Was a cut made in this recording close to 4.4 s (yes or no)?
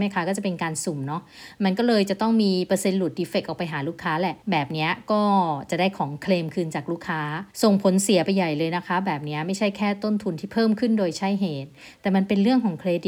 yes